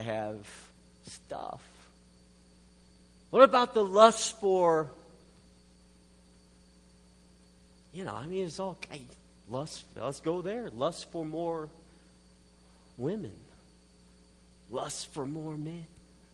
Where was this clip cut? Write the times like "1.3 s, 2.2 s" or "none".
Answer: none